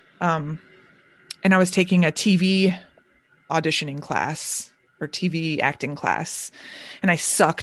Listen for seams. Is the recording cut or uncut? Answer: uncut